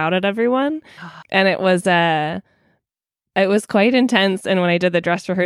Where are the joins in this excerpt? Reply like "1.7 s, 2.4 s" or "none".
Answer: none